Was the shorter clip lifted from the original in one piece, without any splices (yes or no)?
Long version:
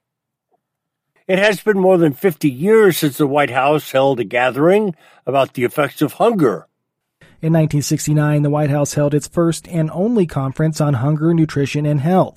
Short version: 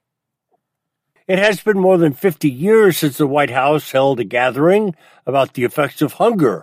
yes